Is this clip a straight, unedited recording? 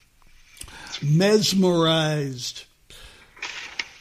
no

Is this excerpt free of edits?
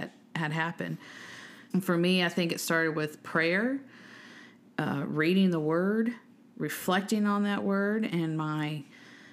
no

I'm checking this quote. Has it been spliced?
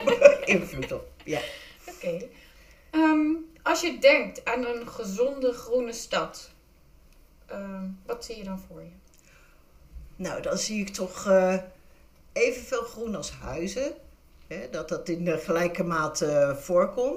no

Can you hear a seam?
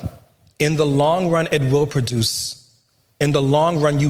no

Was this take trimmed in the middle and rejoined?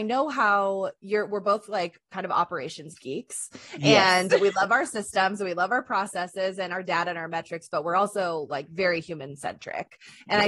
no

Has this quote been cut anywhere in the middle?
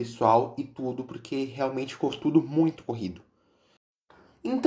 no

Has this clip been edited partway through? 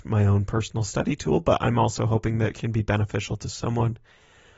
no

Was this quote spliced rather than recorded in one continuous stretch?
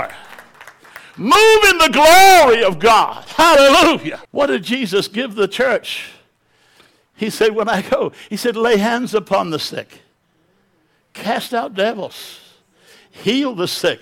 yes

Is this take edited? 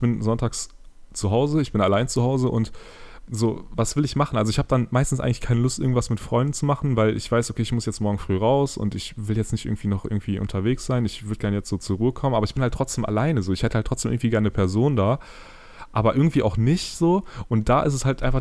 no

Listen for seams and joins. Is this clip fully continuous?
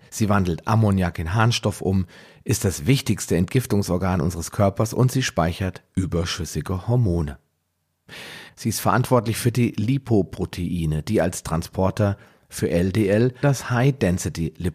no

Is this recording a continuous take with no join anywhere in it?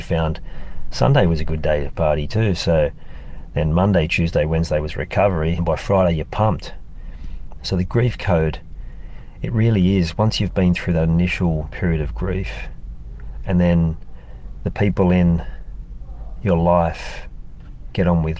no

